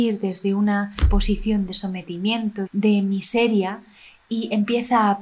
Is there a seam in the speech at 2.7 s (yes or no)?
yes